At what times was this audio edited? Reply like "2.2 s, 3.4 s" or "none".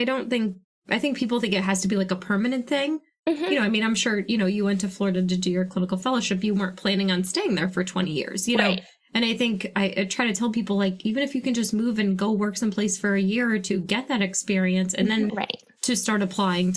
15.3 s